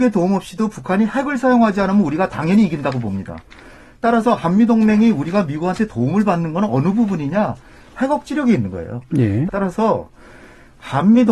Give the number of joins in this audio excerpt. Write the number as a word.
one